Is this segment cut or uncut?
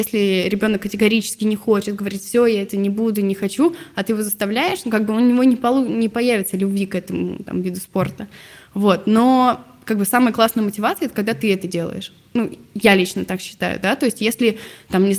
uncut